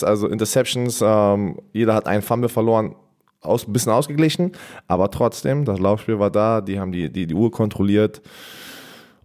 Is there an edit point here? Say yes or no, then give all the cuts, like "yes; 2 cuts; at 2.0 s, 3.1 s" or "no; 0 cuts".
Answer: no; 0 cuts